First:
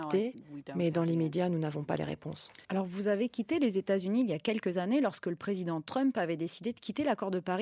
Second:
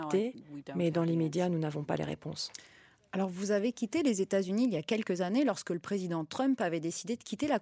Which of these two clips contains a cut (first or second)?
first